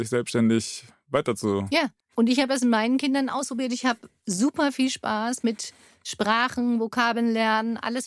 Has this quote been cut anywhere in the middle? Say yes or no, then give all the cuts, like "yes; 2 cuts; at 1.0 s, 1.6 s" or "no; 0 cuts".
yes; 1 cut; at 2.0 s